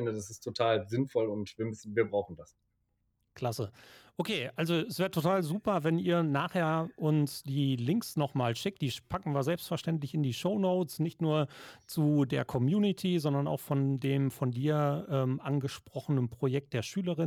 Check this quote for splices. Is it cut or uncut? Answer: uncut